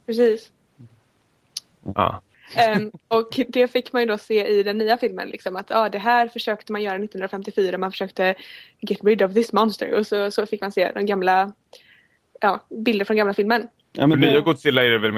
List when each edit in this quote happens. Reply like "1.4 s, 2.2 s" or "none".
2.3 s, 13.8 s